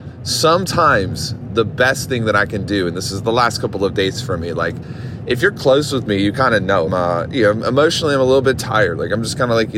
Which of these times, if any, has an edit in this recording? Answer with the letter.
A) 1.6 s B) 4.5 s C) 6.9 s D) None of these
C